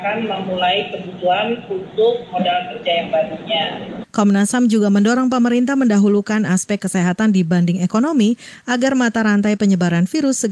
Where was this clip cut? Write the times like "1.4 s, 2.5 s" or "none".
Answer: 4.0 s